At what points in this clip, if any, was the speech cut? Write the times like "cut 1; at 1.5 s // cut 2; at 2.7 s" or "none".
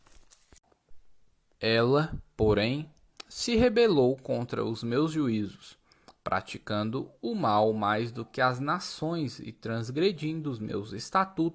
none

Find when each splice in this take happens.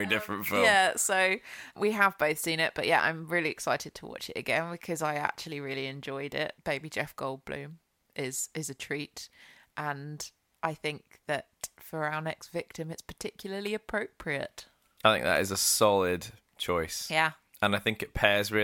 none

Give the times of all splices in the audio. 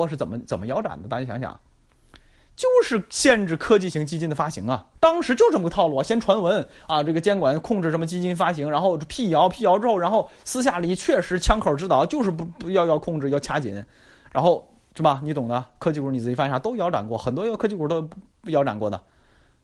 cut 1; at 5.0 s

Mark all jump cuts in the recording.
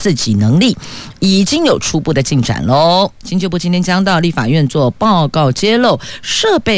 none

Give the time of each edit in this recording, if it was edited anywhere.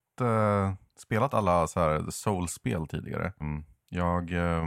cut 1; at 3.4 s

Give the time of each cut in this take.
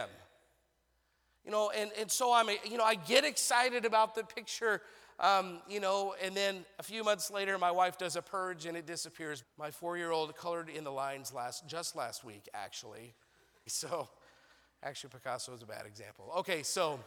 cut 1; at 9.4 s // cut 2; at 13.7 s

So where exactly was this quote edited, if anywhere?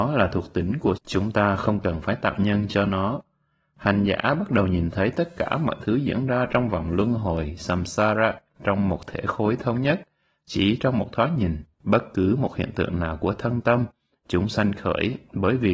cut 1; at 1.0 s // cut 2; at 11.7 s

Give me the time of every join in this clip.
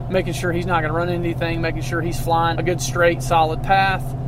cut 1; at 2.5 s

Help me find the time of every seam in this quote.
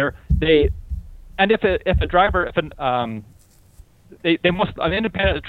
cut 1; at 2.7 s

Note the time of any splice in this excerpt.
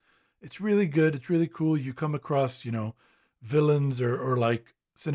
none

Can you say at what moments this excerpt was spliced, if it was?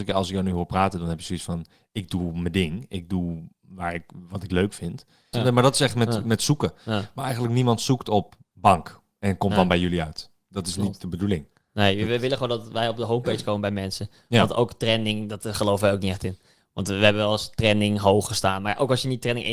cut 1; at 5.3 s

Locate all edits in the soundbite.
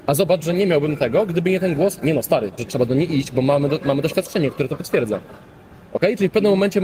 cut 1; at 2.6 s

